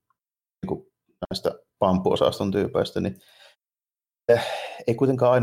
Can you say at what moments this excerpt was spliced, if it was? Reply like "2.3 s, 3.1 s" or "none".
none